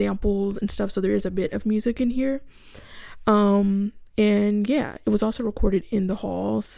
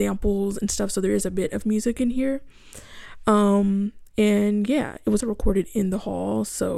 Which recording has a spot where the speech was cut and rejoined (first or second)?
second